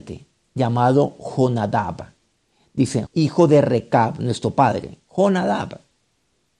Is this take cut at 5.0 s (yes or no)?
no